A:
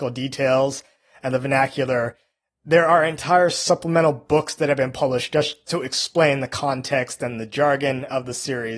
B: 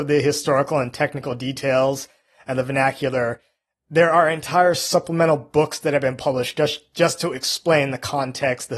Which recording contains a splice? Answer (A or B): A